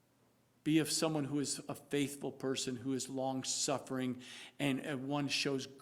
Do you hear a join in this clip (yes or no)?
no